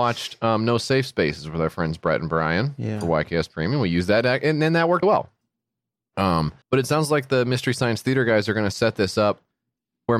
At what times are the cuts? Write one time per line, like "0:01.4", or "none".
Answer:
0:05.0
0:06.6